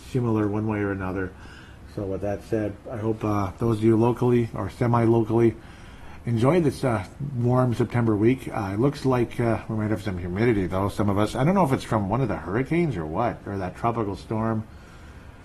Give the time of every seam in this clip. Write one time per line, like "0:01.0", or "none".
none